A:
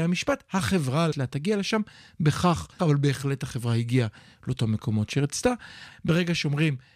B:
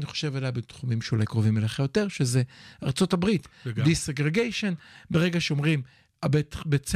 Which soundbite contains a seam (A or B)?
A